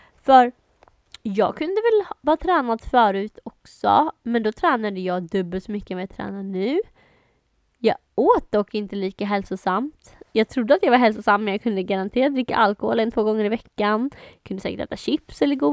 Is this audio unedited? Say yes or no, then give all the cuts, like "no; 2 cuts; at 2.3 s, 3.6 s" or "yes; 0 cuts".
yes; 0 cuts